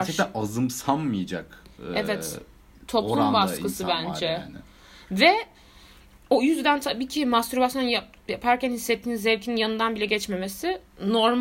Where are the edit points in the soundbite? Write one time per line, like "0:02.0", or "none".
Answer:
none